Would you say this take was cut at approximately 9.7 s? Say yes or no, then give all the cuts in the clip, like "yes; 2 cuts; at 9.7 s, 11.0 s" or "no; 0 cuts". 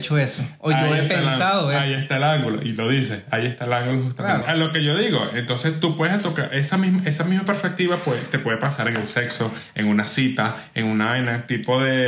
no; 1 cut; at 4.4 s